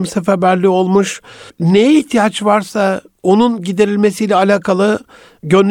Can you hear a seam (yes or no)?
yes